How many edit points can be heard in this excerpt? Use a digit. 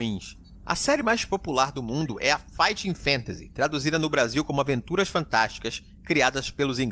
0